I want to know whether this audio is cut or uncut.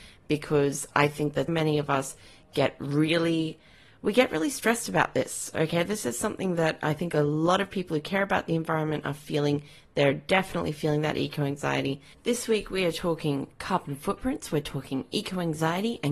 cut